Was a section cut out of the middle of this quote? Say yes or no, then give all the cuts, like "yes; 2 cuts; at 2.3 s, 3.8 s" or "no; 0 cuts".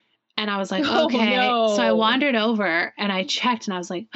no; 0 cuts